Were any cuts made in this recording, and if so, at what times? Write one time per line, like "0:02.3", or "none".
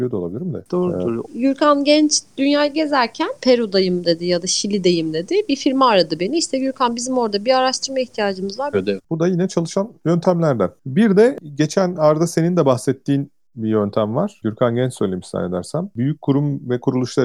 0:01.2
0:08.7